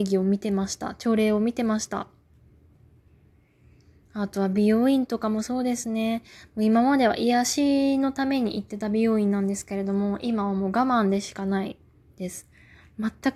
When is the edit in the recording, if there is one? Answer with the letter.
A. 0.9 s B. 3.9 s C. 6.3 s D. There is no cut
D